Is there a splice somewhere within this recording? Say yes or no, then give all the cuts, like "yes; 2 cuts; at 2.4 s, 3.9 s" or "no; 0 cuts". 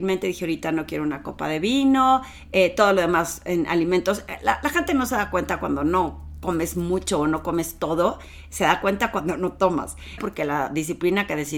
yes; 1 cut; at 10.2 s